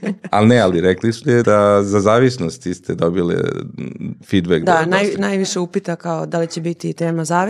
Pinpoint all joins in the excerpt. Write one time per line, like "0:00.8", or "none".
0:01.4